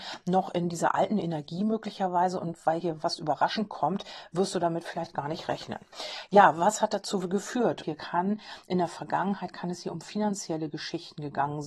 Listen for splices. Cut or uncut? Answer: cut